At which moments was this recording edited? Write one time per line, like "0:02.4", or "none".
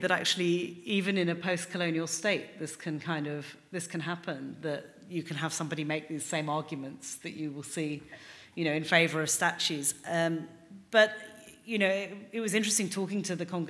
none